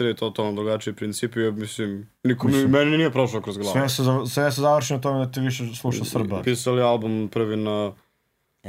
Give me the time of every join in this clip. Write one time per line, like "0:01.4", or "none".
0:06.4